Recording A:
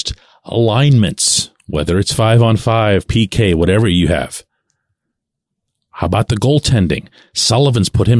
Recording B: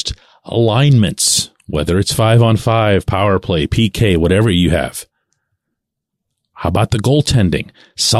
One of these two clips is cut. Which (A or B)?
A